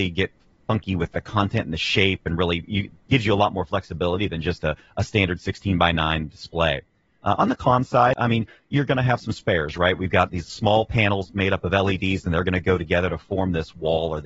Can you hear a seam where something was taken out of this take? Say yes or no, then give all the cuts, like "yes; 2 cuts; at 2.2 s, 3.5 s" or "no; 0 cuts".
no; 0 cuts